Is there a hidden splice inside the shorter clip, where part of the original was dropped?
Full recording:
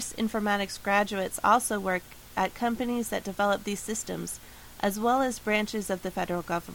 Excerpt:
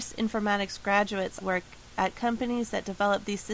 yes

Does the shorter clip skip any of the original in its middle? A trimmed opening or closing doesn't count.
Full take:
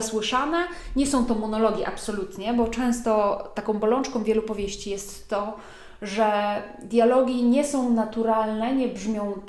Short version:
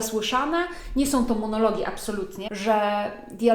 yes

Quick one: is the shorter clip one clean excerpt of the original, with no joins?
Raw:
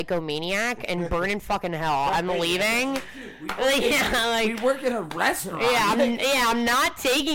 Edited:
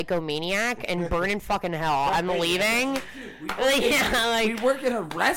yes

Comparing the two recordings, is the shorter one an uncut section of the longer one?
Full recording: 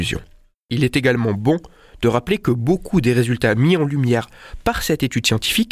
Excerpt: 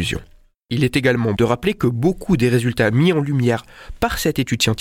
no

